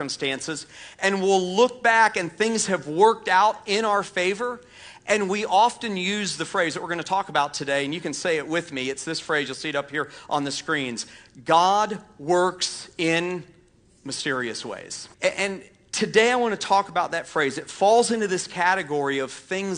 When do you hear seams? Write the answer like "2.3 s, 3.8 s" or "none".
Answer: 15.1 s